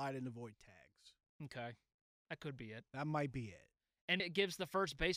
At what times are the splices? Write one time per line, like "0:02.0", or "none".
0:04.2